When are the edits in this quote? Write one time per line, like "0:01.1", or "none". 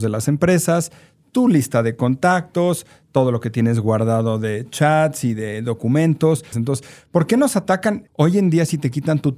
0:06.5
0:08.1